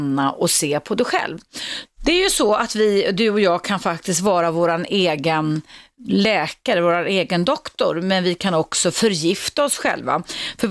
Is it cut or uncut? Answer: cut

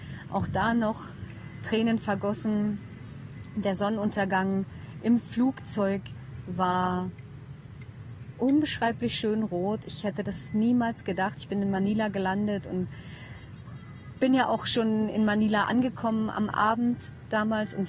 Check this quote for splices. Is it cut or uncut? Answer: uncut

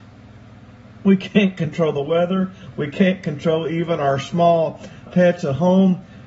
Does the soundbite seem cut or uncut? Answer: cut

